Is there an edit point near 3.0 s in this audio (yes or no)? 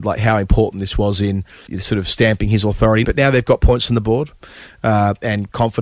yes